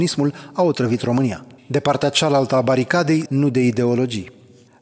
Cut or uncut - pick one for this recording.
cut